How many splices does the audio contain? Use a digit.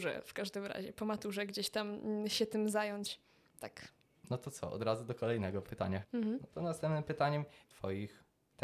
3